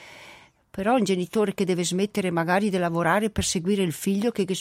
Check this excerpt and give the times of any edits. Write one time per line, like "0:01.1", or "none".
none